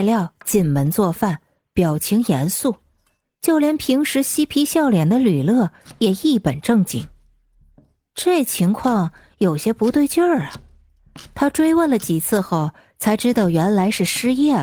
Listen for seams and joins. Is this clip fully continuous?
yes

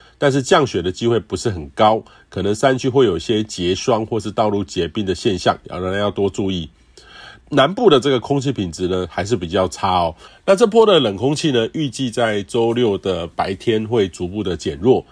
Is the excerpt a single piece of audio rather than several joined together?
no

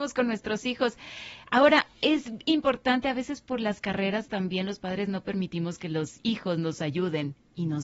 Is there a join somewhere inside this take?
no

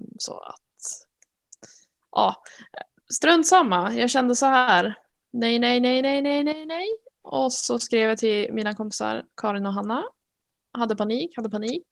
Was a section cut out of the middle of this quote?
no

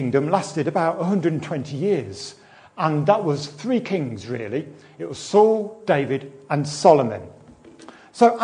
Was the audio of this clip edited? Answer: no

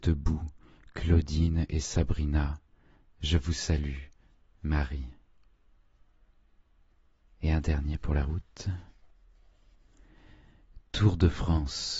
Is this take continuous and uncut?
yes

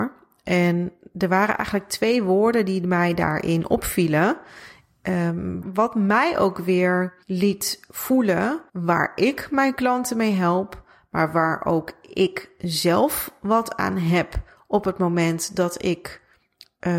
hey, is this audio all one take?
no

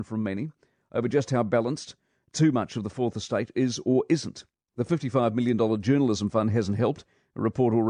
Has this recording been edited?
no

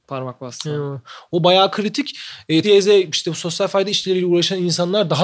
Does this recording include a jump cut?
yes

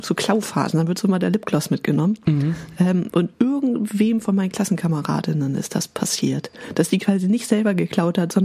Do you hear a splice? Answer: no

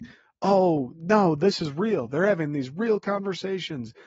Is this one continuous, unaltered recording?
yes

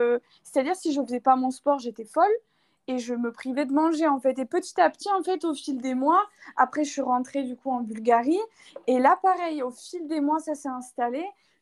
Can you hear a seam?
no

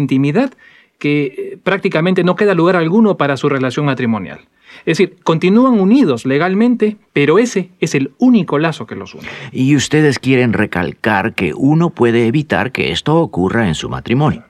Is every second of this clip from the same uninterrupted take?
yes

